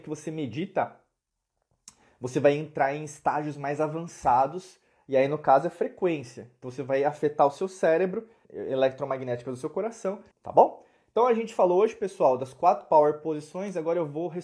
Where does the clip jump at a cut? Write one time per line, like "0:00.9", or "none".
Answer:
0:08.4
0:10.3